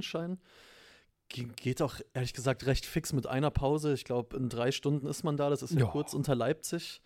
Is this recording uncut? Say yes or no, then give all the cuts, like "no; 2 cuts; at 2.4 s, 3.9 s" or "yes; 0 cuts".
yes; 0 cuts